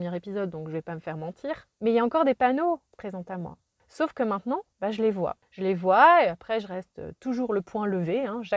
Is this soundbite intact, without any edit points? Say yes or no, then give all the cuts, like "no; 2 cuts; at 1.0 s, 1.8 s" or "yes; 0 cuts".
no; 2 cuts; at 1.7 s, 4.7 s